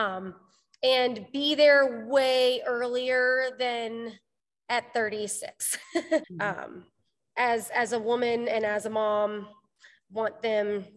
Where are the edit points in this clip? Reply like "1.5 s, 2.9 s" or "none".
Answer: 6.2 s